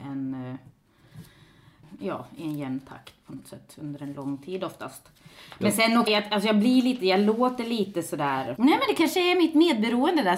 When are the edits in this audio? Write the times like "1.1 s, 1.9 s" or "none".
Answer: 6.1 s, 8.6 s